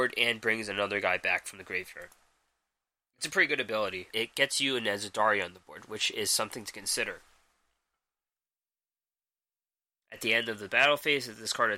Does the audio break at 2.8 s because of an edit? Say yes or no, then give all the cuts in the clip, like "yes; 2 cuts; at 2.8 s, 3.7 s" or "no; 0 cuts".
no; 2 cuts; at 4.1 s, 10.0 s